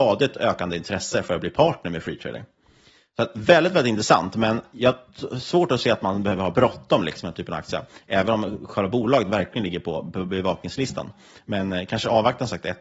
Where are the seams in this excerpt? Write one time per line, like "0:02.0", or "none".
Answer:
none